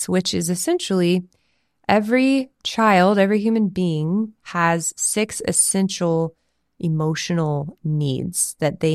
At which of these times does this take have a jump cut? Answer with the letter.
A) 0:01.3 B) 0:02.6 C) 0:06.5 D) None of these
B